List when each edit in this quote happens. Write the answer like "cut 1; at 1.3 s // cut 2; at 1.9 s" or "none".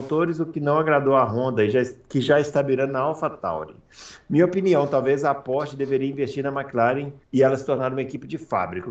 cut 1; at 7.2 s